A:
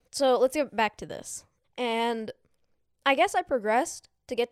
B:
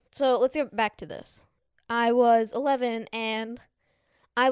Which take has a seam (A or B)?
A